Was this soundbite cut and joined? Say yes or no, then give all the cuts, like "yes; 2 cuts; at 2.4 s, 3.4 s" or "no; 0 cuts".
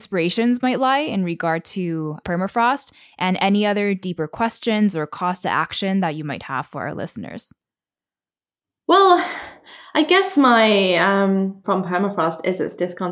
yes; 1 cut; at 11.6 s